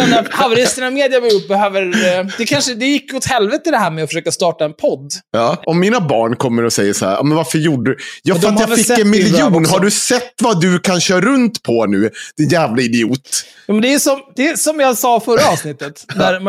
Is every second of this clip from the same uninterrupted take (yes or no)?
no